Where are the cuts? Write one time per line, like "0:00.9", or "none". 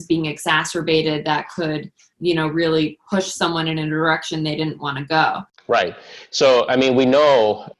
none